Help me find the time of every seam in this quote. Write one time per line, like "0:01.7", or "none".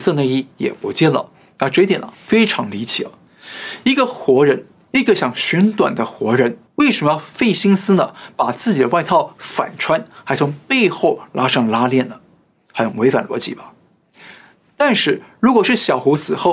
0:06.7